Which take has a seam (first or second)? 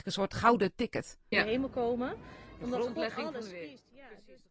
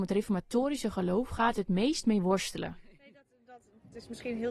first